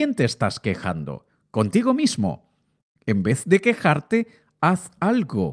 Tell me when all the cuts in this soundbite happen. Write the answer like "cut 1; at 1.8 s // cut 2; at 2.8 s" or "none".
none